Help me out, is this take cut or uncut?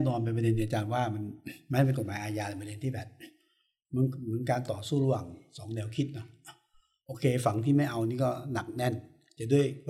uncut